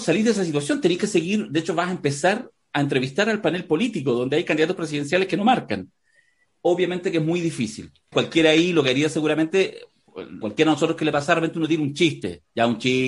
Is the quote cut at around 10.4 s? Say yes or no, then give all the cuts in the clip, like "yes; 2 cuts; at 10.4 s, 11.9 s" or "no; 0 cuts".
yes; 2 cuts; at 8.1 s, 10.4 s